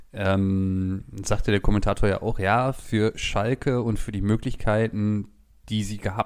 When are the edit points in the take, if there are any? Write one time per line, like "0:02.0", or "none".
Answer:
none